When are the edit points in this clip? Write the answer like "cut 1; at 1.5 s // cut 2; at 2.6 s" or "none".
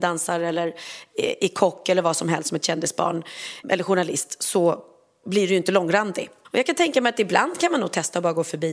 cut 1; at 3.6 s // cut 2; at 6.4 s